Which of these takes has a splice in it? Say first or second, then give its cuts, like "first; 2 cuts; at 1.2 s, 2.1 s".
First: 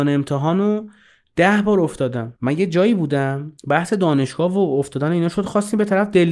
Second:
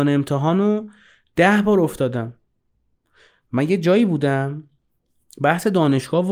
first; 2 cuts; at 2.4 s, 3.6 s